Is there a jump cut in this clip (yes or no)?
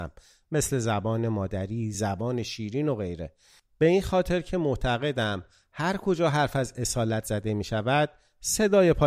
yes